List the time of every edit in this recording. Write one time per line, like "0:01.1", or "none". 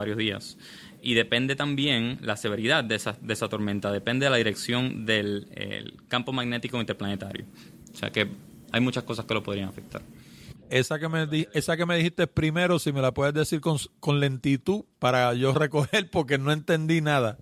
0:10.5